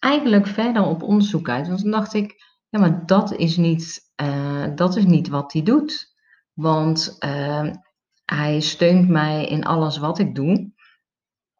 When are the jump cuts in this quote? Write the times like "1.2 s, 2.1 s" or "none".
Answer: none